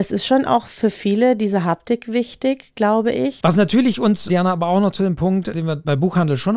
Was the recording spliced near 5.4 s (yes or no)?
no